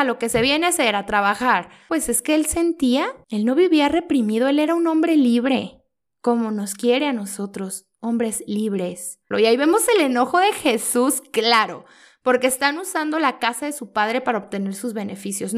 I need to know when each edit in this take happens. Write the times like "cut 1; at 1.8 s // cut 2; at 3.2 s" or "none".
cut 1; at 9.3 s

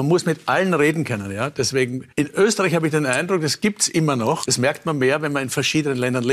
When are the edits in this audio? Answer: cut 1; at 2.1 s // cut 2; at 4.4 s

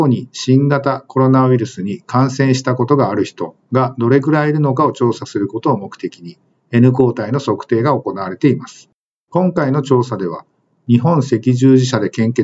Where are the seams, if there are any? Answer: cut 1; at 9.3 s

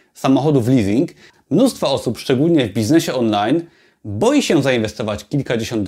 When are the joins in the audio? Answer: cut 1; at 1.3 s

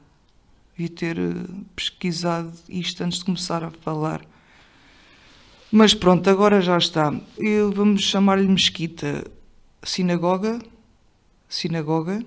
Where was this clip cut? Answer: cut 1; at 7.4 s

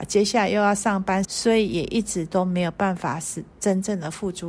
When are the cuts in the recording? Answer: cut 1; at 1.2 s

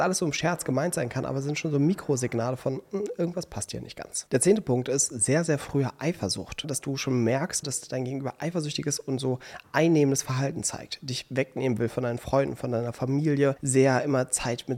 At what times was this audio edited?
cut 1; at 7.6 s

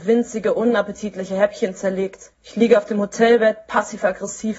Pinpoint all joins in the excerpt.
cut 1; at 2.3 s

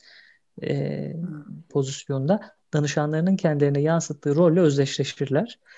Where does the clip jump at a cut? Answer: cut 1; at 1.7 s

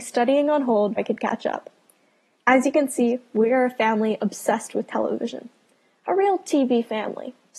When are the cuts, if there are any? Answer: cut 1; at 1.0 s

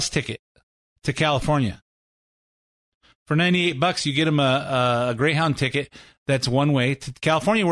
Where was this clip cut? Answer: none

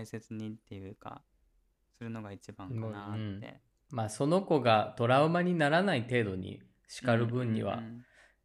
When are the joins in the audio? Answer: cut 1; at 3.9 s

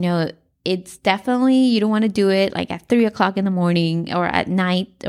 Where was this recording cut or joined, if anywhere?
none

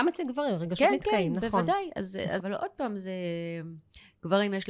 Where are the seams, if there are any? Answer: cut 1; at 2.4 s

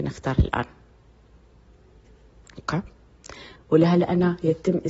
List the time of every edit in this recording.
cut 1; at 3.6 s

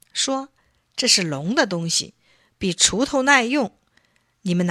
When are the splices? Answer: none

